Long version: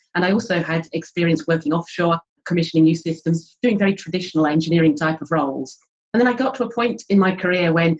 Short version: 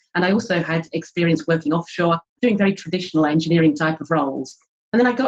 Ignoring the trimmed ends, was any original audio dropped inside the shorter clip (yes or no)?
yes